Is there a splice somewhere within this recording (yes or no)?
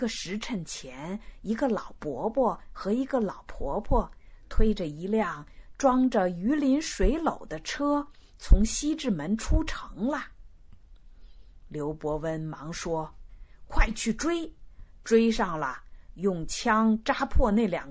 no